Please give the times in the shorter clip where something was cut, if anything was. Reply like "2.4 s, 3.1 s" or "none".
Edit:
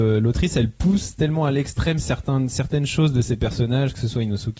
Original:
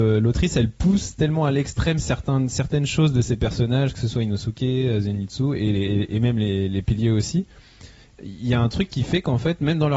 none